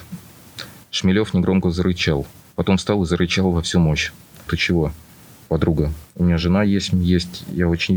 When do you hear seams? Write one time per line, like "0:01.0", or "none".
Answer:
0:04.5